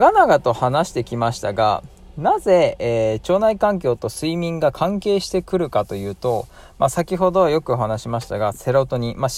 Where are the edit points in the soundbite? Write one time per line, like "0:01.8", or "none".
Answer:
none

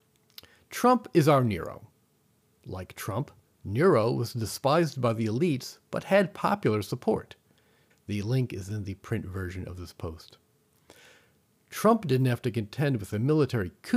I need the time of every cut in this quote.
0:07.9

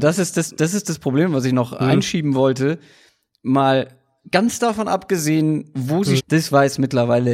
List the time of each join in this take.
0:06.2

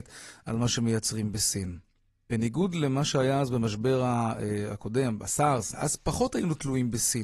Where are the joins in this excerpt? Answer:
0:02.3
0:05.7

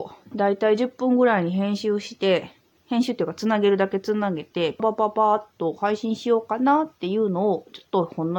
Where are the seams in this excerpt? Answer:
0:04.8

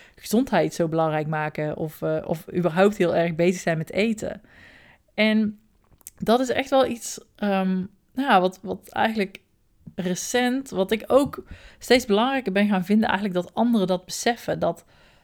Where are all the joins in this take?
none

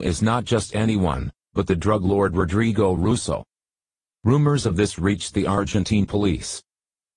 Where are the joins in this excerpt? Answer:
0:04.1

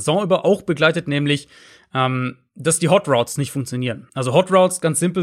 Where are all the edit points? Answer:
none

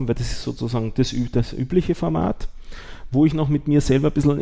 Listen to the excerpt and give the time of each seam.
none

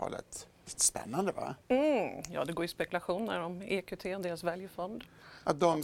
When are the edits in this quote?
none

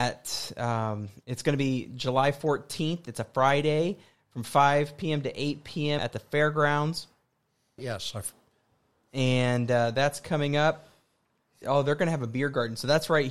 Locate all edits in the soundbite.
0:06.0
0:07.8
0:11.6

